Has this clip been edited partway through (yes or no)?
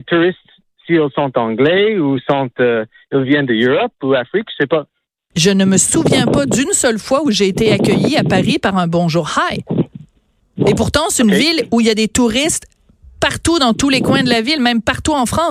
yes